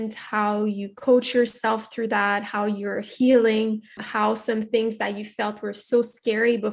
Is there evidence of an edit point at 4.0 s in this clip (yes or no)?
yes